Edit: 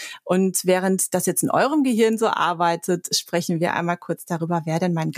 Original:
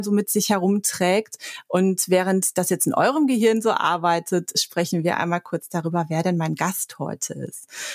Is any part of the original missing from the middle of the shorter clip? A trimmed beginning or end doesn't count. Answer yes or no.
no